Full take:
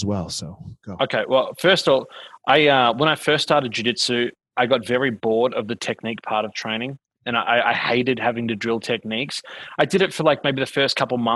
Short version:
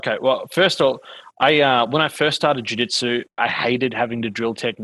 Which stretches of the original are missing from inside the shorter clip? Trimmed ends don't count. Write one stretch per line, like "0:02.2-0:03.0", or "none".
0:04.4-0:07.6